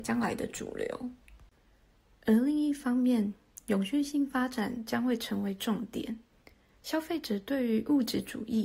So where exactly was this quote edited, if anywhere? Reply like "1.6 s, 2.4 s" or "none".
none